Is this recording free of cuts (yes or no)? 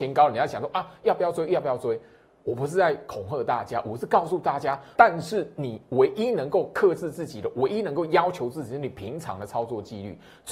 no